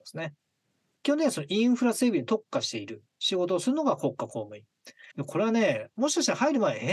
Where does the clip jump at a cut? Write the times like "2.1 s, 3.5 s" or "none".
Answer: 1.0 s, 5.1 s